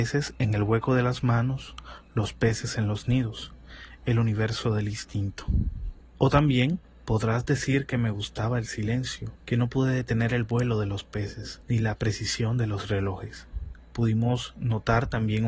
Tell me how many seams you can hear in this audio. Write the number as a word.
one